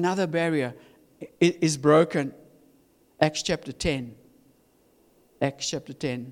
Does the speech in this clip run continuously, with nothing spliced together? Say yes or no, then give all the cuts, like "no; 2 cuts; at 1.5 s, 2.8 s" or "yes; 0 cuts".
yes; 0 cuts